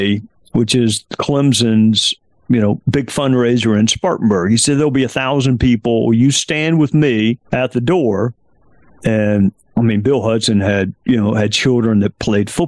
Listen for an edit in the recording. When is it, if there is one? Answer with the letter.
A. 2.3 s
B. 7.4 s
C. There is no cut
B